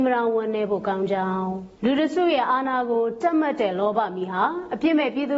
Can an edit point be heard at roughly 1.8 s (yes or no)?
yes